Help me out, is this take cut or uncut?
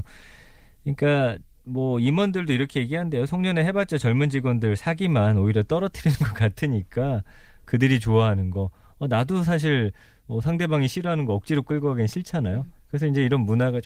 uncut